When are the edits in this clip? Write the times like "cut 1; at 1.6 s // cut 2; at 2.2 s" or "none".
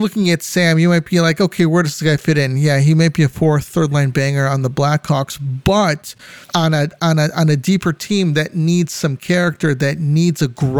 cut 1; at 6.4 s